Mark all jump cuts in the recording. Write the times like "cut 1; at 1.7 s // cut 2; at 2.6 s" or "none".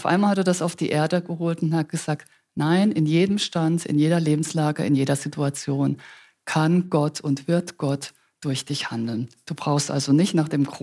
none